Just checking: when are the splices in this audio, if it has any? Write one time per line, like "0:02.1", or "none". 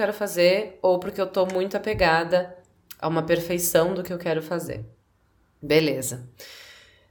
none

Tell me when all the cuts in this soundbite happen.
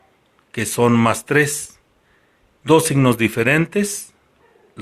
0:02.5

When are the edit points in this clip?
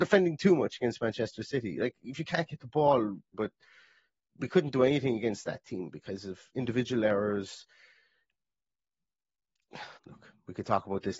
0:03.3
0:10.0

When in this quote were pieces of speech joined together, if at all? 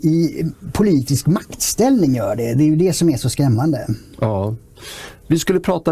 none

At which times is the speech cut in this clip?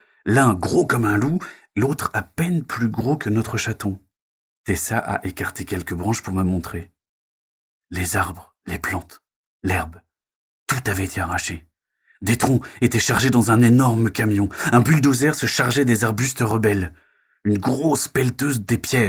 0:04.5

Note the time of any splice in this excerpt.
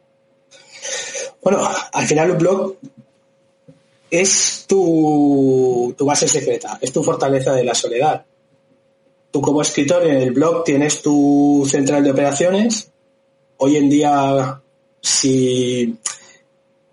none

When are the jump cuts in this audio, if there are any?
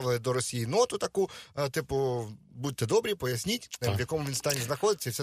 0:03.8

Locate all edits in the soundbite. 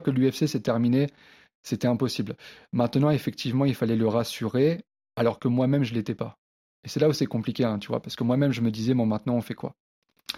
none

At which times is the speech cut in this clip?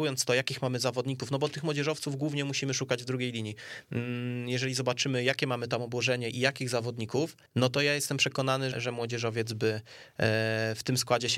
0:07.5
0:08.7

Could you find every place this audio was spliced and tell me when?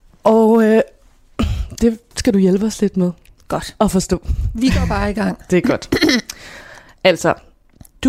none

